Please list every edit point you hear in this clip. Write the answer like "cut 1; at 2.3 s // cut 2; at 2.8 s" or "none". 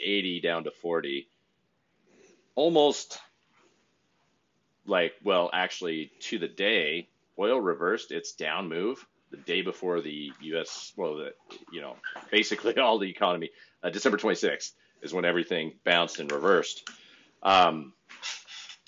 cut 1; at 7.3 s

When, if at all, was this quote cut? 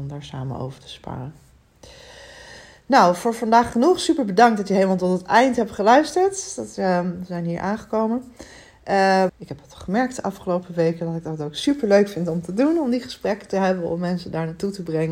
cut 1; at 9.3 s

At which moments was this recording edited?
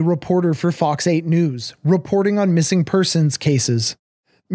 none

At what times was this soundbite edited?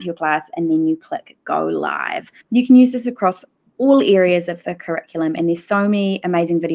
cut 1; at 2.4 s

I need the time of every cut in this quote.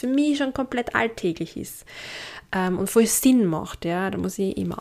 none

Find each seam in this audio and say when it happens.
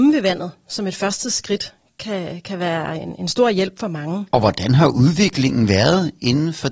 none

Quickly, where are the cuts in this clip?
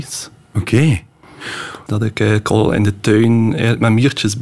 cut 1; at 1.9 s

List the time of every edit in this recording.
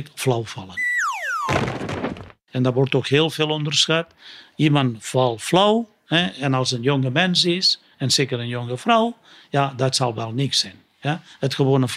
none

